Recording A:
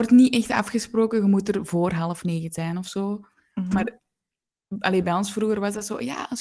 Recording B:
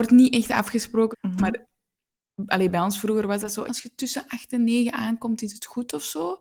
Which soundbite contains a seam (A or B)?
B